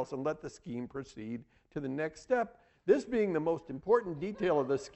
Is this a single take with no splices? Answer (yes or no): no